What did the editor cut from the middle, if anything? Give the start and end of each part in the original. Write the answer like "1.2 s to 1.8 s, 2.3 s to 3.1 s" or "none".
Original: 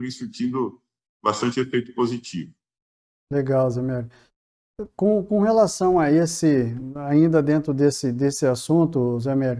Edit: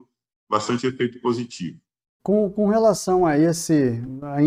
2.9 s to 4.9 s